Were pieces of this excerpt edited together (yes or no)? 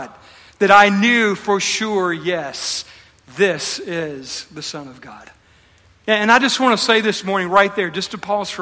no